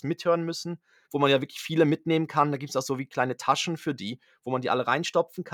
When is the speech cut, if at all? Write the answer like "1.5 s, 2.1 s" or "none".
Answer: 1.0 s